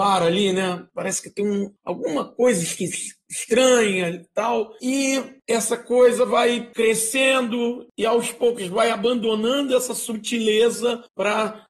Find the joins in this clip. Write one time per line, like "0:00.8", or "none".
none